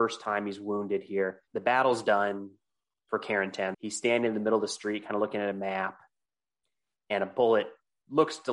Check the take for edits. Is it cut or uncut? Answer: cut